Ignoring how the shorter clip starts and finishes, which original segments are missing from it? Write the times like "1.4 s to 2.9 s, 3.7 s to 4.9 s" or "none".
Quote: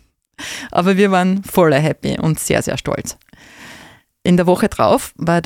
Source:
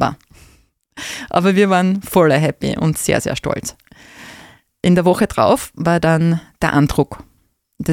none

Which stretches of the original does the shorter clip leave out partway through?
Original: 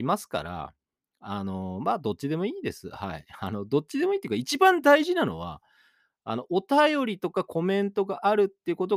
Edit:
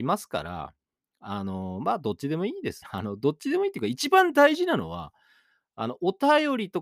2.8 s to 3.3 s

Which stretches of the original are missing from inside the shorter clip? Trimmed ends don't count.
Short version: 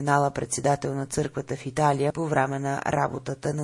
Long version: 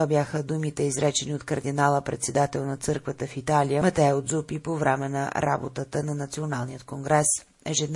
3.8 s to 4.6 s

